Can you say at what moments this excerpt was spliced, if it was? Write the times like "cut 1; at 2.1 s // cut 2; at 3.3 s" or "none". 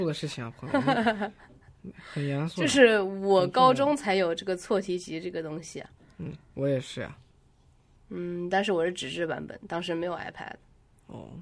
none